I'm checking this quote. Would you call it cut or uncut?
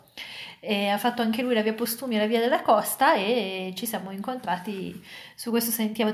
uncut